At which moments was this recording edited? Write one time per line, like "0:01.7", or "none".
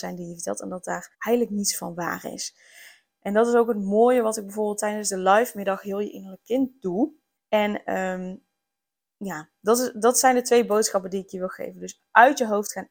0:01.1
0:07.4